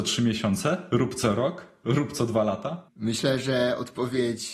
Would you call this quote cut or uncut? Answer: uncut